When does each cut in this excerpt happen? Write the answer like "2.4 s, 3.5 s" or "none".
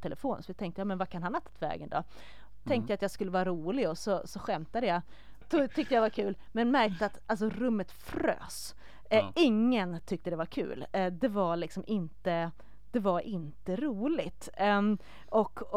5.4 s